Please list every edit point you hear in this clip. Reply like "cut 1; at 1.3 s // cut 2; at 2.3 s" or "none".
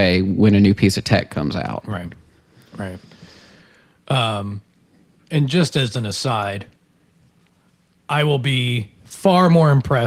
none